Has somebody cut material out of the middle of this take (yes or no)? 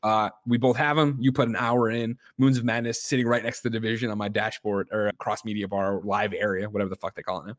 yes